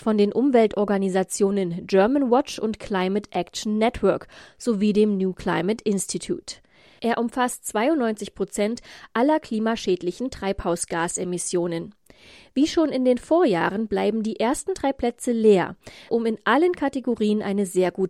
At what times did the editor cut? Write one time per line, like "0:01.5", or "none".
0:16.1